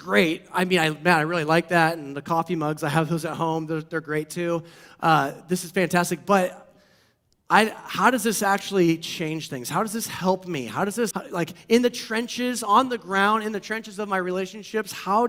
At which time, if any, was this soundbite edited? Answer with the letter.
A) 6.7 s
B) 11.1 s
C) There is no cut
B